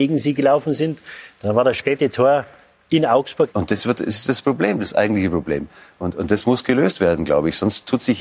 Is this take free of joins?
no; 1 cut; at 3.5 s

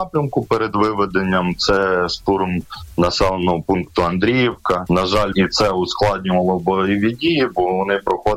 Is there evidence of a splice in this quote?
yes; 1 cut; at 5.3 s

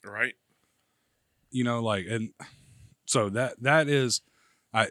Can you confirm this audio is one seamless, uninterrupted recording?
yes; 0 cuts

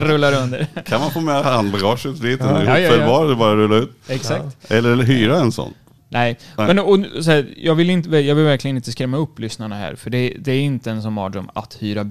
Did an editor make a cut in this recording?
no; 0 cuts

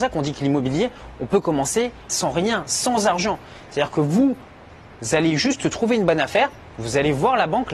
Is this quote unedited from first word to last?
yes; 0 cuts

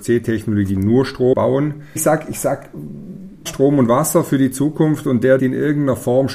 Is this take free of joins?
no; 3 cuts; at 2.0 s, 3.5 s, 5.4 s

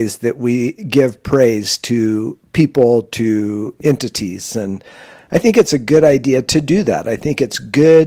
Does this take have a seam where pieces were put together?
no; 0 cuts

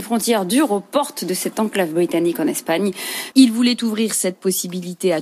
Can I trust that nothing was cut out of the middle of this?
no; 1 cut; at 3.3 s

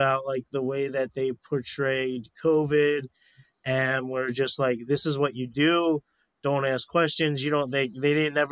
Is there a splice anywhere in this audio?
no; 0 cuts

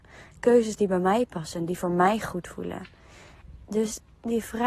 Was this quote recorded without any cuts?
yes; 0 cuts

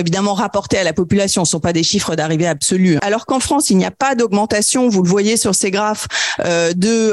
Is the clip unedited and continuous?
no; 1 cut; at 3.0 s

